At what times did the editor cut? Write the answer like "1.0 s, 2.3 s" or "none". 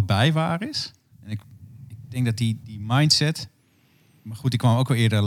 1.1 s, 2.6 s